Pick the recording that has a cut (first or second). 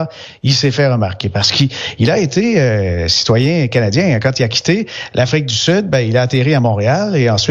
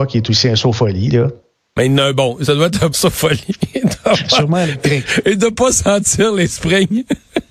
second